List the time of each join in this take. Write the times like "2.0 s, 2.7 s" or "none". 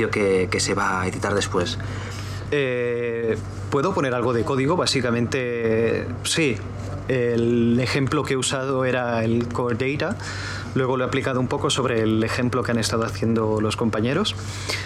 2.5 s